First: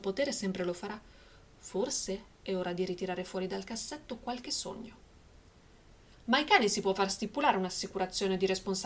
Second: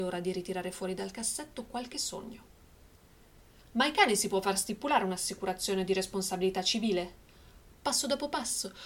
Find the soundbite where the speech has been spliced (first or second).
second